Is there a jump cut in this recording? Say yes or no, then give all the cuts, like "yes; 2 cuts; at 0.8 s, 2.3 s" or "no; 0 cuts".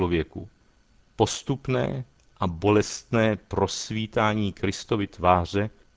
no; 0 cuts